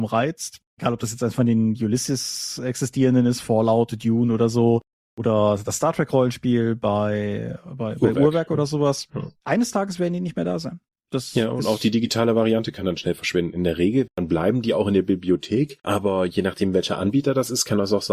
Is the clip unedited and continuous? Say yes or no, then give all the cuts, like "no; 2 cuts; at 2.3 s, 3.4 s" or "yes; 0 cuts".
no; 1 cut; at 14.1 s